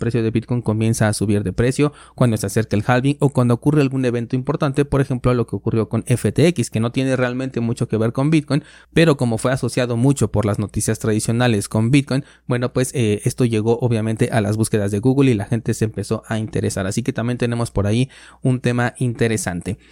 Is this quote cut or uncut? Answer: uncut